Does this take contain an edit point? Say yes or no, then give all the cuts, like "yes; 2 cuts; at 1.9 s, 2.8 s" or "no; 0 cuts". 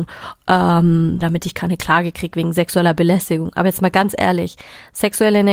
yes; 1 cut; at 1.2 s